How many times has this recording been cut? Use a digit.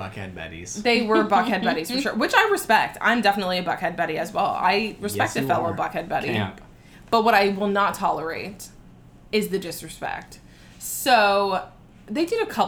0